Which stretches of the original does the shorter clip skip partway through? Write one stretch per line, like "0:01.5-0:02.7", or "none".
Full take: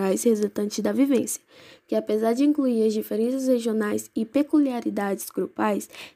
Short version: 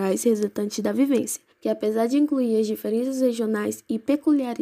0:01.5-0:01.8